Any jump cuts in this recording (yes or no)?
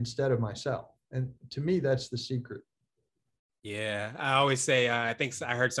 no